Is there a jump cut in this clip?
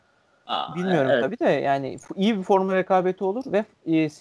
no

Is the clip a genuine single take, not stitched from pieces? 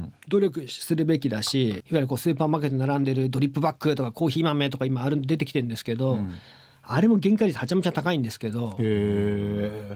yes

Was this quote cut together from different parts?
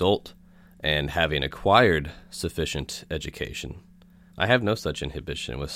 yes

